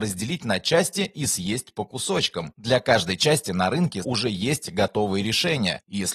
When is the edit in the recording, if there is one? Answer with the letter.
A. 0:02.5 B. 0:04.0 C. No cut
B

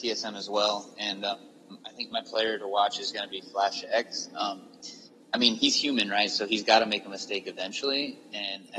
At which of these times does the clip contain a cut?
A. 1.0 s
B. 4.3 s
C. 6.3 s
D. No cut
D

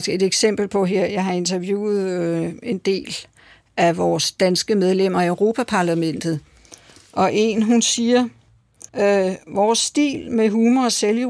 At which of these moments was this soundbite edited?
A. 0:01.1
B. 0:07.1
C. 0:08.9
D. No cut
C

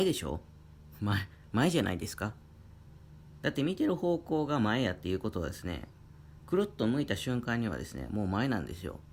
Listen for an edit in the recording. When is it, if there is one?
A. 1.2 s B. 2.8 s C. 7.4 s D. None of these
D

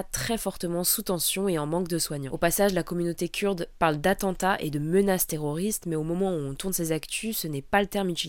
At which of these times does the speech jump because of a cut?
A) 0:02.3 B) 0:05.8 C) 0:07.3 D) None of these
A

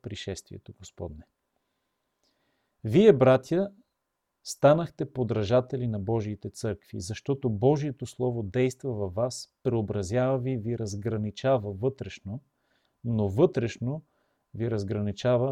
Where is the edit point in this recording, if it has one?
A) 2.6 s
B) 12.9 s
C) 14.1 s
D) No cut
B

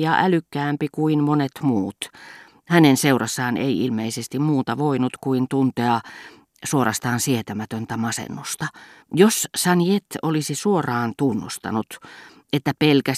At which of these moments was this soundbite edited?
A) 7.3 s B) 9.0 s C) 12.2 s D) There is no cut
B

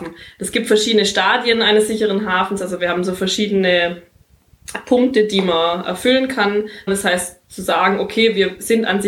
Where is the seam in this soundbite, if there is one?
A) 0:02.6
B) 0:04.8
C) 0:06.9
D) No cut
C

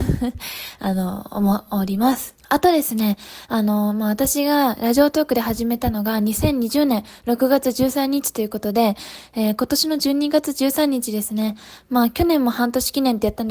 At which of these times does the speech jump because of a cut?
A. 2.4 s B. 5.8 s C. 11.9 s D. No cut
A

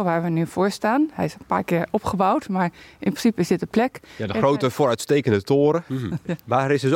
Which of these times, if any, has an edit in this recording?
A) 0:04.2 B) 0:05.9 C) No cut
B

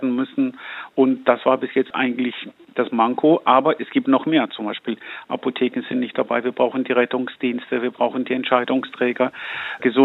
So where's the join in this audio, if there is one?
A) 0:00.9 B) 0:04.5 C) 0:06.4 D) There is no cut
D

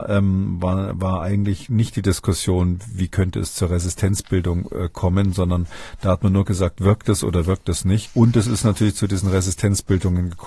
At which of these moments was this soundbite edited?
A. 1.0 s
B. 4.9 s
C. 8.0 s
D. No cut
C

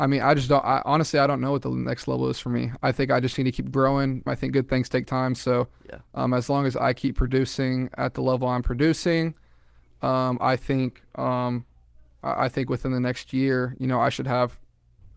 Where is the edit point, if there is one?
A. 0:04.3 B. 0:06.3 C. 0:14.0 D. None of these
A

